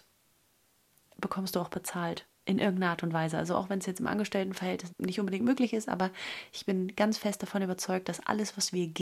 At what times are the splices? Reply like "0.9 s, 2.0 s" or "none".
4.9 s